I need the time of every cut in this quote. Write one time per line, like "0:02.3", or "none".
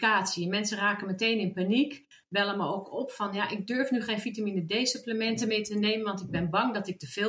none

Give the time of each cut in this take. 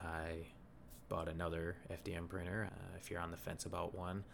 0:02.7

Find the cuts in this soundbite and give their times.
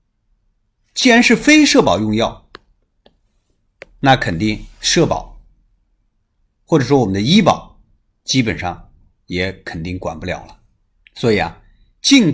0:11.0

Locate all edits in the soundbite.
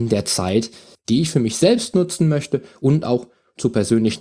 0:00.9

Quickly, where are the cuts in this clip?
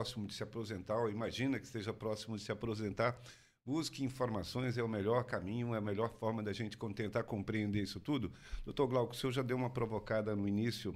none

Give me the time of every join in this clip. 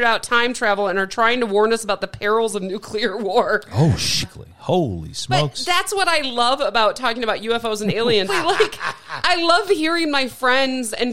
0:04.2
0:08.3

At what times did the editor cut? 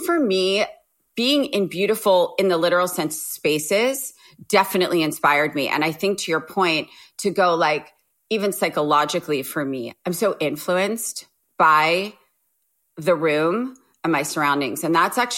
none

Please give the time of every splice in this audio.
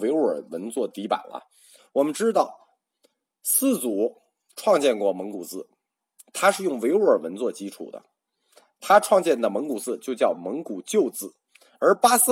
0:01.8

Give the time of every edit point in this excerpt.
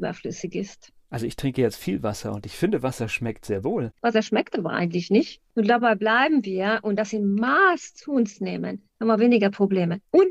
0:03.9
0:05.5

